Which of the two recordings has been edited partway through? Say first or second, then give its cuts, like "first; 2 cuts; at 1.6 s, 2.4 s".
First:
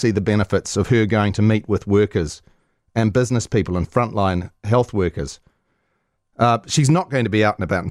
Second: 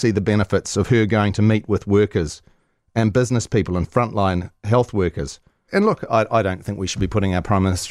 second; 1 cut; at 5.7 s